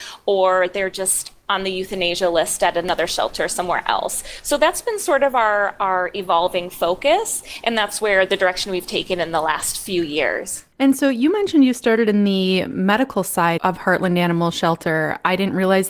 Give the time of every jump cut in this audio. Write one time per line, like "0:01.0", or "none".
0:10.7
0:13.6